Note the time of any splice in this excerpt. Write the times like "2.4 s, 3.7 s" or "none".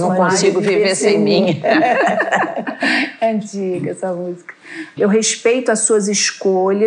5.0 s